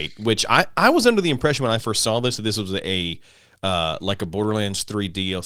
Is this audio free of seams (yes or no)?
yes